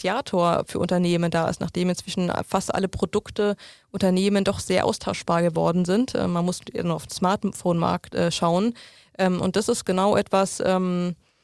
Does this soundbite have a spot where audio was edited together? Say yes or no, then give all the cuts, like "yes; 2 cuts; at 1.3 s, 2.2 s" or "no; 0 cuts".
no; 0 cuts